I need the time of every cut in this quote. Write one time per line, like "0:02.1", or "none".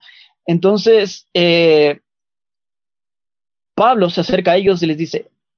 none